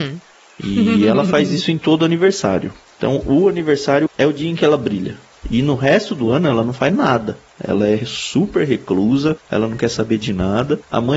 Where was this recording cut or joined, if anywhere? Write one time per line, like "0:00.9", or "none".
0:04.1